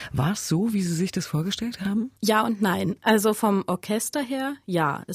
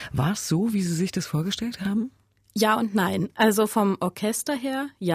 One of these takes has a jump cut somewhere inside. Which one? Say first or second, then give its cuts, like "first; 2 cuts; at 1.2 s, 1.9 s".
first; 1 cut; at 2.2 s